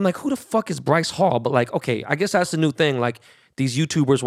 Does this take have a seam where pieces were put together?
no; 0 cuts

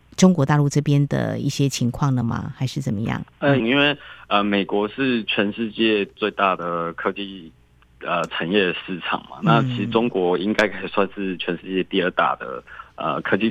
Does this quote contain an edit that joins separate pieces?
yes; 1 cut; at 3.6 s

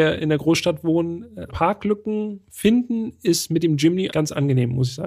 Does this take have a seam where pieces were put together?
yes; 2 cuts; at 1.5 s, 4.1 s

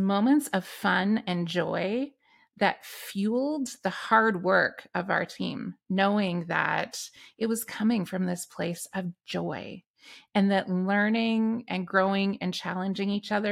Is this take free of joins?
yes; 0 cuts

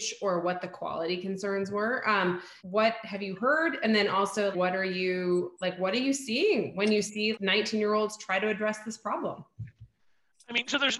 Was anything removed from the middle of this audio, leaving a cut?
yes; 3 cuts; at 2.6 s, 4.5 s, 7.3 s

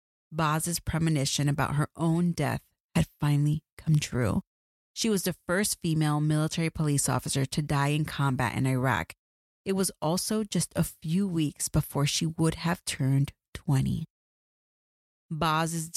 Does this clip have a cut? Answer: no; 0 cuts

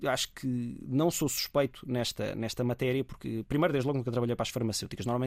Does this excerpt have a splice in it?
no; 0 cuts

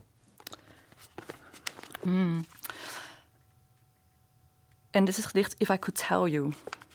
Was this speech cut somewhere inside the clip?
yes; 1 cut; at 2.0 s

